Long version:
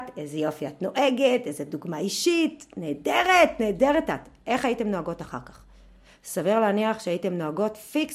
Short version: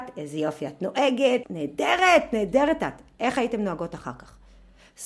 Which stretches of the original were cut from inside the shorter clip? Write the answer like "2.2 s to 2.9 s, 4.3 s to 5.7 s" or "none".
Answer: 1.4 s to 2.7 s